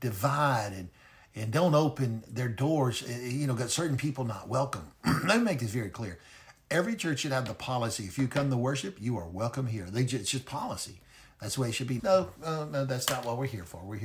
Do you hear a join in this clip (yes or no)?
yes